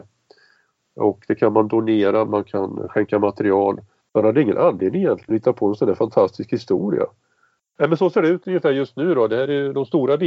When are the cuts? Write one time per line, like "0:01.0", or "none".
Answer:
0:02.3
0:04.0
0:07.6